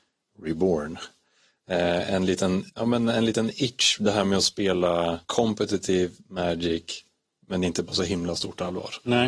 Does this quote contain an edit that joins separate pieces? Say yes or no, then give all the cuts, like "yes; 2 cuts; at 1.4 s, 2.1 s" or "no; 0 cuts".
no; 0 cuts